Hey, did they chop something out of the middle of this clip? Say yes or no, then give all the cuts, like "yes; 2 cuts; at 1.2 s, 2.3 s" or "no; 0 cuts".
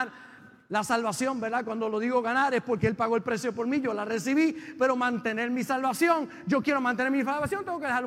no; 0 cuts